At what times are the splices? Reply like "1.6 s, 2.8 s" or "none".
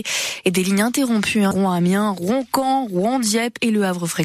1.5 s

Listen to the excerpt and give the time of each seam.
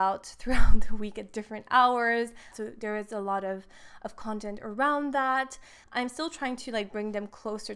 2.5 s, 5.8 s

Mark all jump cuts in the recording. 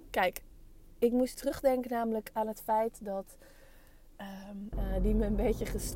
1.3 s, 4.7 s

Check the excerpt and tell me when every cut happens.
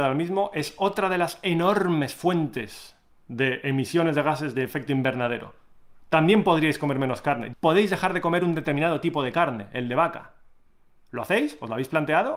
7.5 s

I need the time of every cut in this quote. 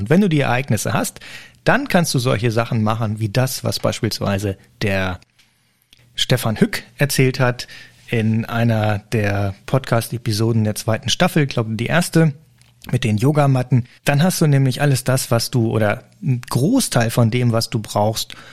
14.0 s

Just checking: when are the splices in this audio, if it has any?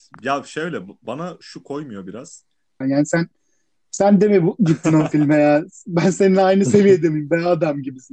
2.8 s

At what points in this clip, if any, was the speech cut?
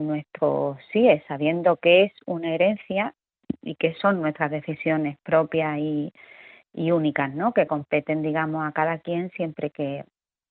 none

